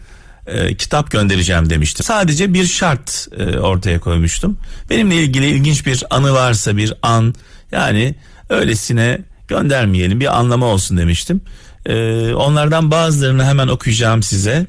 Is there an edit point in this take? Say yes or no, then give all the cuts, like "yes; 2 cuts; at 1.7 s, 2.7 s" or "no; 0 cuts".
yes; 1 cut; at 2.0 s